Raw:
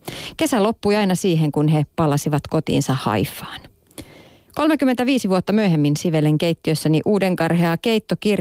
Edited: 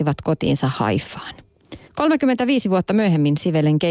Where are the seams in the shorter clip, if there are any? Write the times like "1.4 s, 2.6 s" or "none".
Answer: 1.8 s